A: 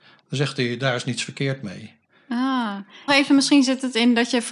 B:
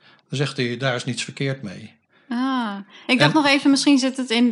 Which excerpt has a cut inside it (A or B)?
A